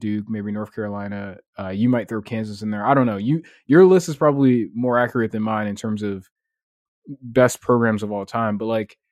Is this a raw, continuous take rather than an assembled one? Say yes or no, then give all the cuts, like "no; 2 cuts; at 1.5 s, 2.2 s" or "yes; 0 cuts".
yes; 0 cuts